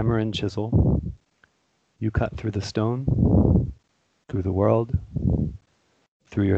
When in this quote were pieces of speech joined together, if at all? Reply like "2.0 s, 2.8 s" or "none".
none